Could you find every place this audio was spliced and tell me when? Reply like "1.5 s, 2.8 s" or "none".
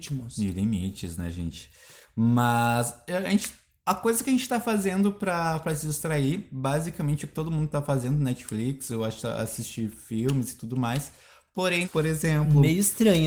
11.8 s